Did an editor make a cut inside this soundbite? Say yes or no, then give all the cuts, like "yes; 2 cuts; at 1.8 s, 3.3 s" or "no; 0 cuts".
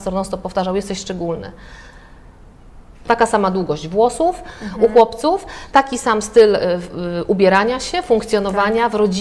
yes; 1 cut; at 3.0 s